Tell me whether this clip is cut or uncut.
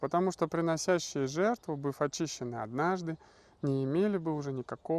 uncut